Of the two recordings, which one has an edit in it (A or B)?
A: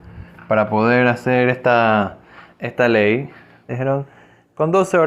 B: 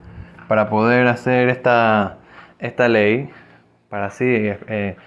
A